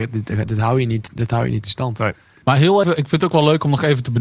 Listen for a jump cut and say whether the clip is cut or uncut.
cut